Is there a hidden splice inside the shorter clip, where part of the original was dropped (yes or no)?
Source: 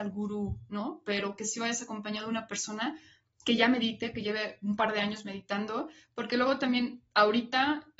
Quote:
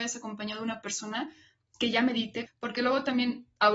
yes